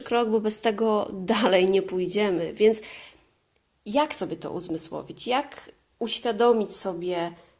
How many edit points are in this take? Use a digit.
0